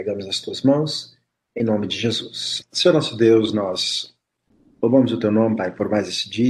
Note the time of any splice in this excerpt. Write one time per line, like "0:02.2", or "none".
0:02.6

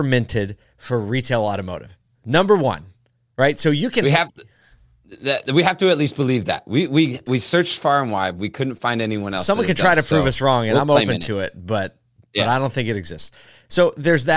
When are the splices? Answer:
none

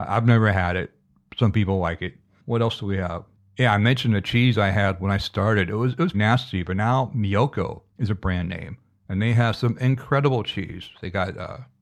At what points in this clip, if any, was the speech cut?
0:06.1
0:07.9

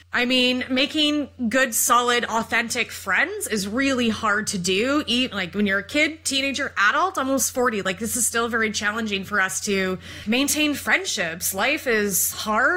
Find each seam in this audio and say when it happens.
0:10.2

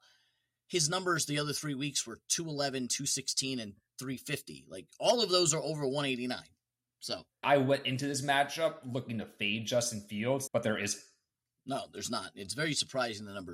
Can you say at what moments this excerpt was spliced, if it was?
0:07.4
0:10.5

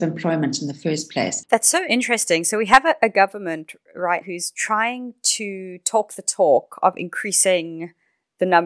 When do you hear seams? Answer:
0:01.4
0:04.2

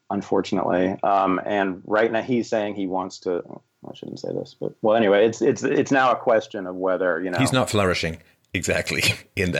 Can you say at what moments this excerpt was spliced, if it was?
none

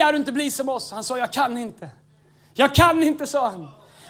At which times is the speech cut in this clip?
none

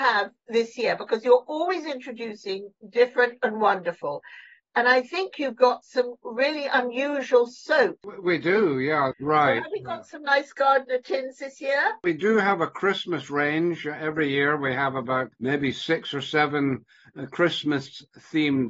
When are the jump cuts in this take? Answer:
0:09.1

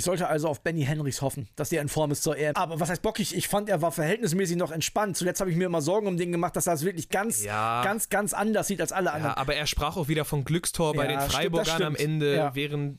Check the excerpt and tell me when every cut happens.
0:02.5

